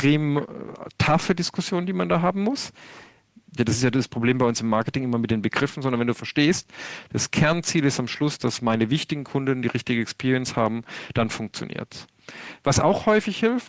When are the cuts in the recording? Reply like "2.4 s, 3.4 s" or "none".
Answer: 3.6 s

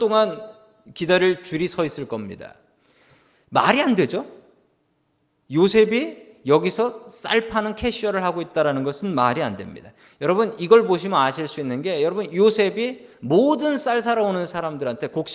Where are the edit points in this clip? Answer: none

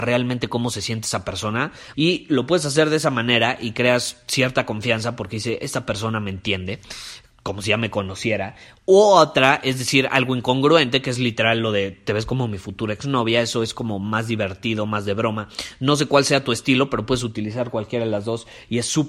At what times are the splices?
1.9 s

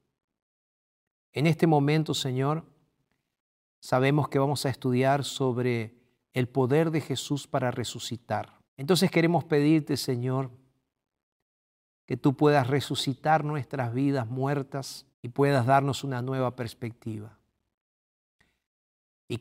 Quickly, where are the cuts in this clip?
8.6 s, 15.1 s

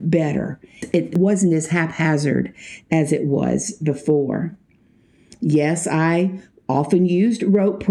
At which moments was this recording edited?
none

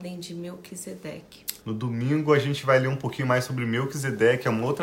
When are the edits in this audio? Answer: 1.6 s

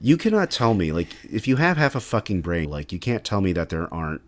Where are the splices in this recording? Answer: 2.6 s

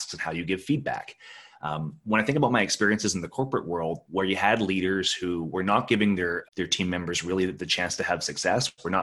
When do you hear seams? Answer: 4.0 s, 6.4 s

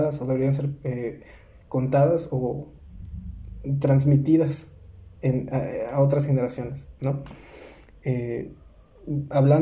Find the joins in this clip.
none

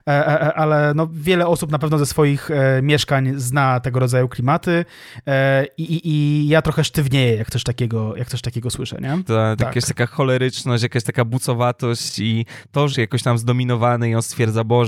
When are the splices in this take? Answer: 9.3 s, 12.9 s

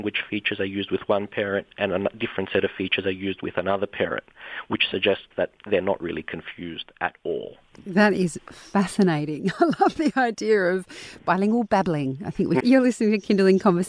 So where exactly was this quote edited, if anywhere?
12.6 s

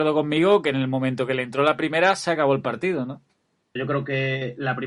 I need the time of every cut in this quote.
3.8 s

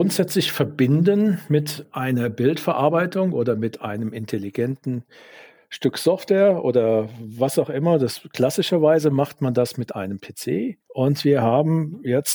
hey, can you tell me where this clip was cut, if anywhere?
10.8 s

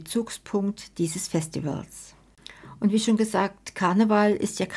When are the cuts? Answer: none

